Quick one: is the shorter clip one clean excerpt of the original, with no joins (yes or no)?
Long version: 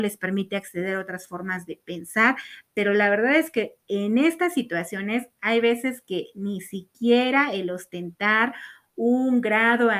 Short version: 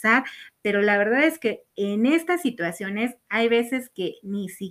yes